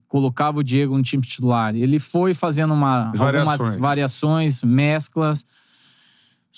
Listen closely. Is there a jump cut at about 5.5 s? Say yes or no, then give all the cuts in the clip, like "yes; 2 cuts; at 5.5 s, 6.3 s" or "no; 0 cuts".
no; 0 cuts